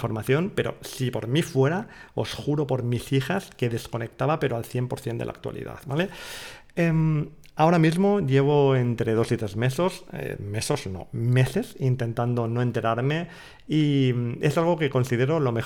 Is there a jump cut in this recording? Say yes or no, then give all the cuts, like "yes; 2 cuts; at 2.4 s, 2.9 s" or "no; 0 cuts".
no; 0 cuts